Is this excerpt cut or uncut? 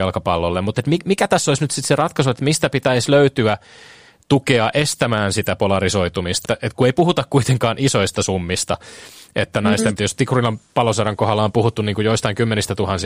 cut